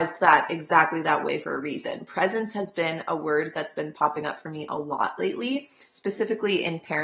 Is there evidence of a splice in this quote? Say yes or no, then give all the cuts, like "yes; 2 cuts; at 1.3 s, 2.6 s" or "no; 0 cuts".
no; 0 cuts